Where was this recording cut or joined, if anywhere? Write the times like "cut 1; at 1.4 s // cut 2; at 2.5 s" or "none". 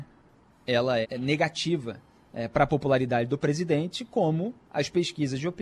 cut 1; at 1.0 s